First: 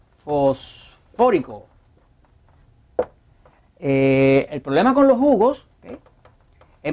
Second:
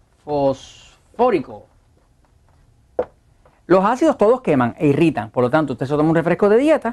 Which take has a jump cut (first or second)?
first